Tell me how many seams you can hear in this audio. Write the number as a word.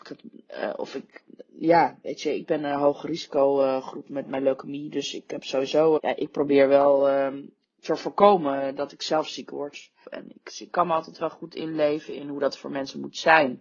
two